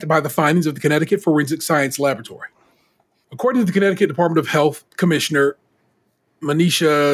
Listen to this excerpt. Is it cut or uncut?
cut